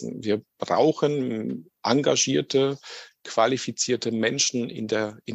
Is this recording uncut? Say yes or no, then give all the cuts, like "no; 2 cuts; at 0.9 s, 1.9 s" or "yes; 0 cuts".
yes; 0 cuts